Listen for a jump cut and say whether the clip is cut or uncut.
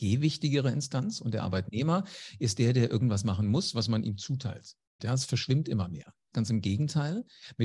cut